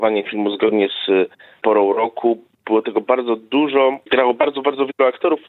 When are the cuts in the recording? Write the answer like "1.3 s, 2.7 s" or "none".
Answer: 3.0 s